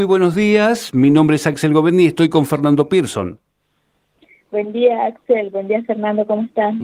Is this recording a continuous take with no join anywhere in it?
yes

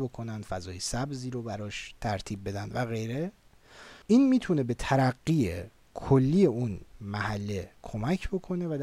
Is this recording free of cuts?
no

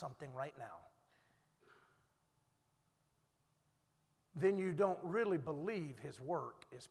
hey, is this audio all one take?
yes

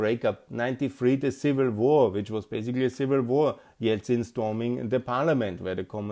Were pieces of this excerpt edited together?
no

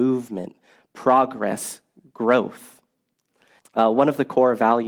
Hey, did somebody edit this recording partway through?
yes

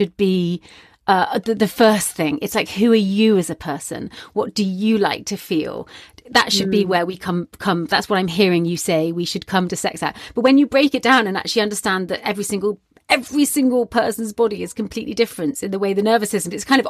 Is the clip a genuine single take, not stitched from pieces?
yes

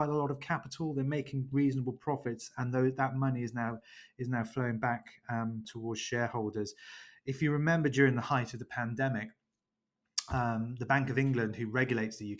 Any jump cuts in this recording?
yes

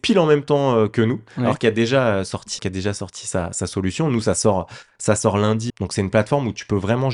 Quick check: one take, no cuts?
no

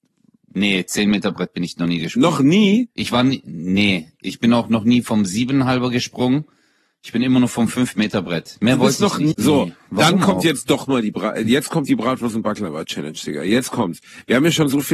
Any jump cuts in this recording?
yes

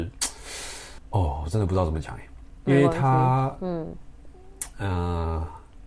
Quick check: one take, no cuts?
yes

